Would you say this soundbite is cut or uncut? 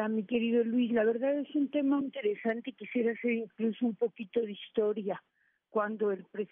cut